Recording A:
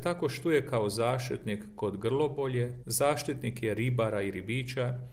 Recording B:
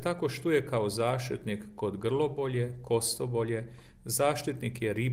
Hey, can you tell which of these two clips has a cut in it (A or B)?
A